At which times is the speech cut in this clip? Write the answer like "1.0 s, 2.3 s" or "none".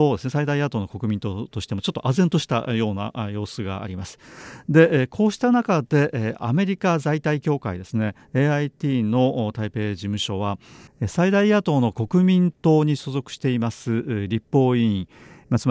none